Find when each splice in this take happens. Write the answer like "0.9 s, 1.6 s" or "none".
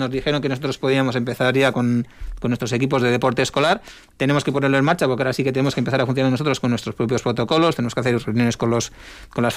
none